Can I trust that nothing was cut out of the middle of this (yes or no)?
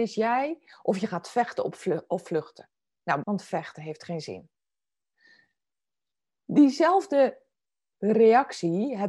no